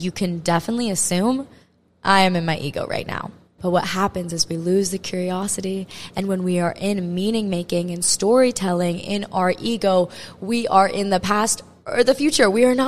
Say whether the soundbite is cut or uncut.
cut